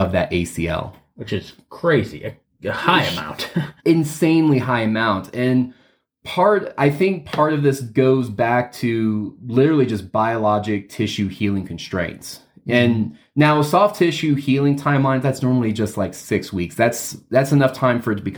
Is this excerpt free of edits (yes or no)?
no